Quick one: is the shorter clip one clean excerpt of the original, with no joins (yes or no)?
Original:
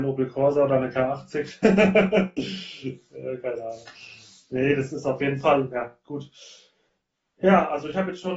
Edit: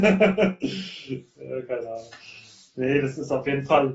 yes